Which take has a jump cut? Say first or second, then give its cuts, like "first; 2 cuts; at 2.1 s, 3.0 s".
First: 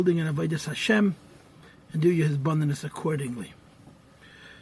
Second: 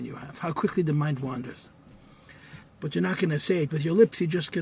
second; 1 cut; at 2.7 s